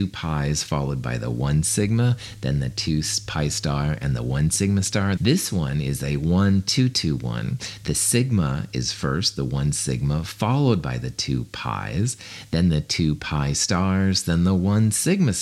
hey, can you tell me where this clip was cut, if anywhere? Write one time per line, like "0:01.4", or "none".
0:05.2